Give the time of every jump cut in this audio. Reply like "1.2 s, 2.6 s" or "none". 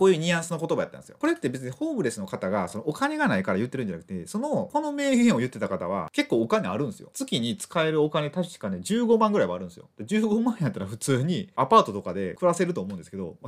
none